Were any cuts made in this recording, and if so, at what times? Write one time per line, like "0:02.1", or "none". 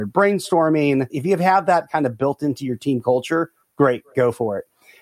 none